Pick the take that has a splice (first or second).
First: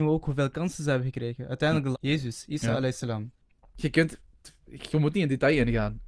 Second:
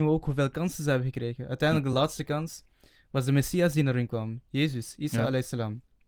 first